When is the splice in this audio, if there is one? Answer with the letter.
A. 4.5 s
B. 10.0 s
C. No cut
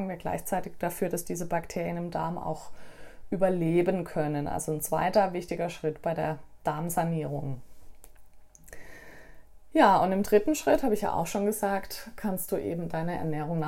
C